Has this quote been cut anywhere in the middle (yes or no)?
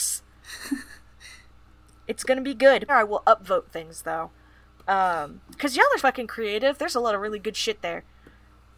yes